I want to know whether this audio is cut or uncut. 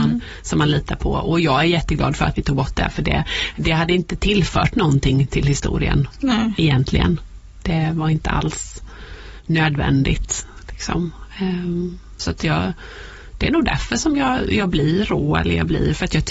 uncut